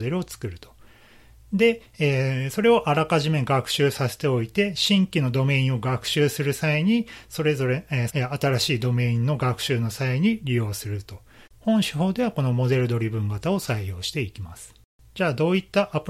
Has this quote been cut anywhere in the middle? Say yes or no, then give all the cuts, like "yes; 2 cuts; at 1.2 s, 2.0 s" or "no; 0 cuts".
yes; 2 cuts; at 8.1 s, 11.5 s